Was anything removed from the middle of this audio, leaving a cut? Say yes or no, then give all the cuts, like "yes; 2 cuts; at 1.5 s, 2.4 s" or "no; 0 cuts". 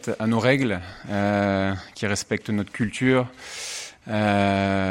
no; 0 cuts